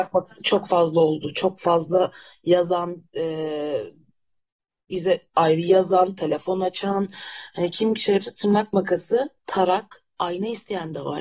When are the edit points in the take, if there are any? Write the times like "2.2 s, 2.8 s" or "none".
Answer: none